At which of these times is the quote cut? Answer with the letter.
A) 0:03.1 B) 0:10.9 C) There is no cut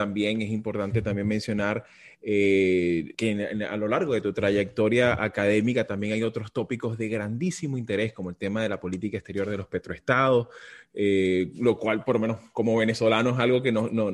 A